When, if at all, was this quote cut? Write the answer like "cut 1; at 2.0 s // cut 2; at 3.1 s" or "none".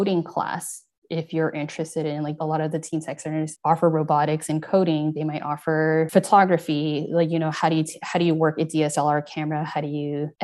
cut 1; at 2.4 s

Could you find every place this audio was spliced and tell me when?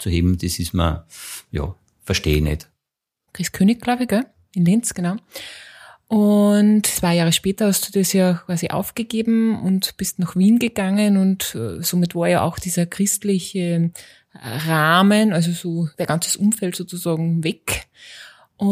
cut 1; at 3.3 s

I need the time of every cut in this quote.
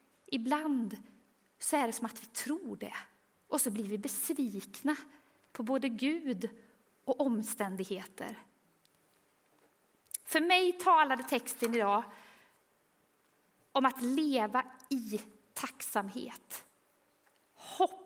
none

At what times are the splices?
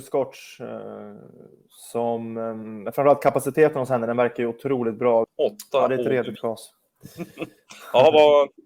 cut 1; at 5.2 s

